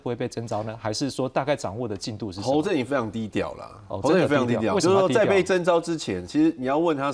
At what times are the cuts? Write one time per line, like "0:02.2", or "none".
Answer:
none